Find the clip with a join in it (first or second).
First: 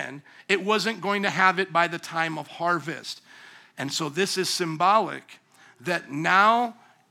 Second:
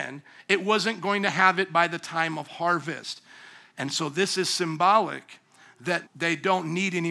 second